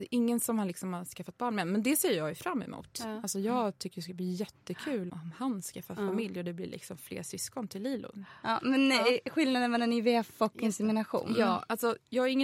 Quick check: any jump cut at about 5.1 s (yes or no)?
yes